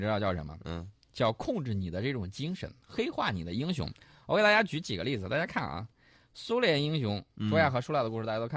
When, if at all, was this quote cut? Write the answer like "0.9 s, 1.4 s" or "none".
none